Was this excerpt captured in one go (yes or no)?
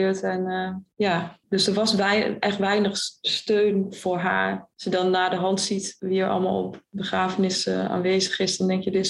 yes